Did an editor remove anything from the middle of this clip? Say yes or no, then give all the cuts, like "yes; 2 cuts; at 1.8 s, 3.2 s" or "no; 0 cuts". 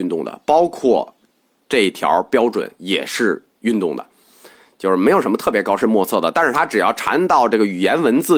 no; 0 cuts